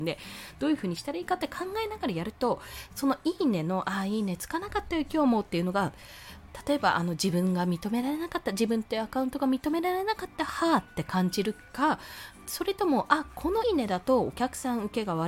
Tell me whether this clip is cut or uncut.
cut